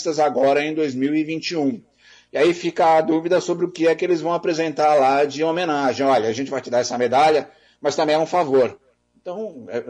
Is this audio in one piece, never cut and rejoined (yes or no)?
yes